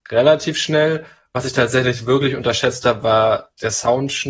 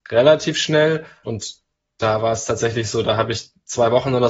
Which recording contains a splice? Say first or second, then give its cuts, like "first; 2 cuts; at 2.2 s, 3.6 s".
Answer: second; 1 cut; at 1.2 s